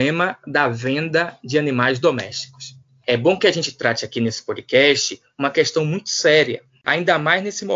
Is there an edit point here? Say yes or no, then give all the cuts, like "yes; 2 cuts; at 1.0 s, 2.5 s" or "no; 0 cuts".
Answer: no; 0 cuts